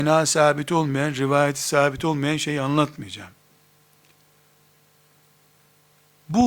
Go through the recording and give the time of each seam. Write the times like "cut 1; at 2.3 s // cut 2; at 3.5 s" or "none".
none